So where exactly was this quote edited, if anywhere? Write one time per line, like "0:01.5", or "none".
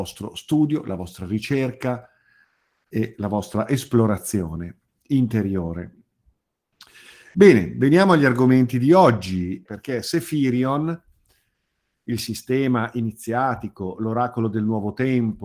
0:09.7